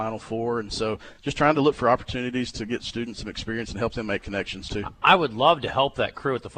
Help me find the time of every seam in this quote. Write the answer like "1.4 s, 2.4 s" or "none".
none